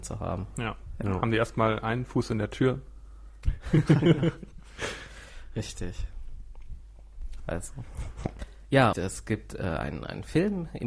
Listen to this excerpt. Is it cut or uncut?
cut